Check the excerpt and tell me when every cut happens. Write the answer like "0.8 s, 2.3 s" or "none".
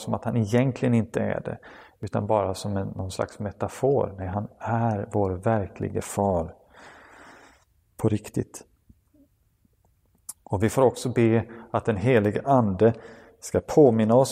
none